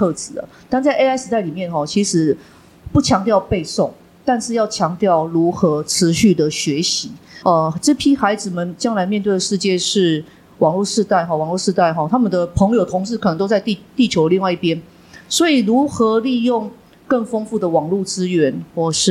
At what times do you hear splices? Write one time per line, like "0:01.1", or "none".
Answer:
0:07.4

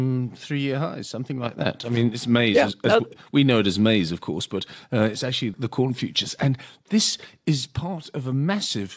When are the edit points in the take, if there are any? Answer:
none

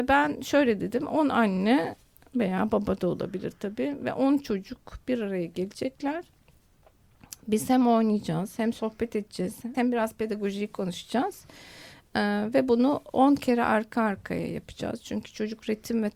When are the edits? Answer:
0:09.7

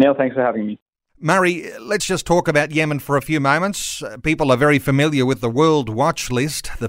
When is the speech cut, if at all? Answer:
none

